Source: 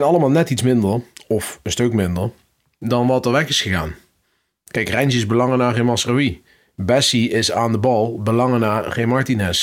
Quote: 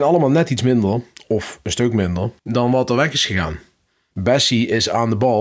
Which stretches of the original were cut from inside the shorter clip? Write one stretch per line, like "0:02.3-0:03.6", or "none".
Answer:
0:02.4-0:02.7
0:04.5-0:06.7